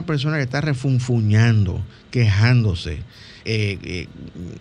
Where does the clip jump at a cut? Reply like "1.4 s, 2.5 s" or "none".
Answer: 3.4 s